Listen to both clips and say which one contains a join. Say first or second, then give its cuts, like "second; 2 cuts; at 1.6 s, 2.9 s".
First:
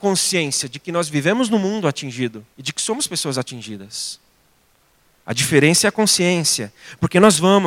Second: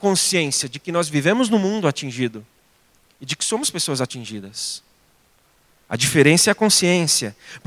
first; 1 cut; at 2.5 s